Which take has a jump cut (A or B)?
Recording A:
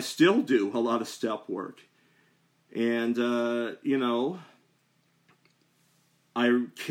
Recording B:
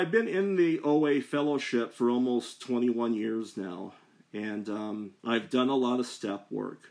B